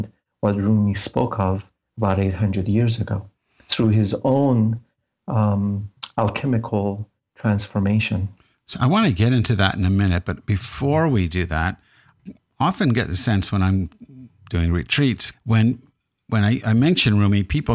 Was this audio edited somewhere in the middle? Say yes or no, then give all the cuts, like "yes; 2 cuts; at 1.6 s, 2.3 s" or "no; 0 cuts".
yes; 2 cuts; at 12.2 s, 15.3 s